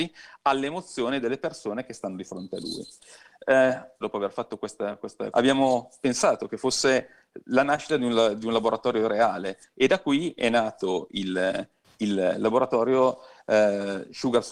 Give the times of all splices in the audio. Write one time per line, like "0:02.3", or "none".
0:04.0
0:05.3